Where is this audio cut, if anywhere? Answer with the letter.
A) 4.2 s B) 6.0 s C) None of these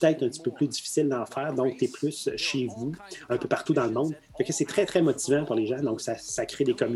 C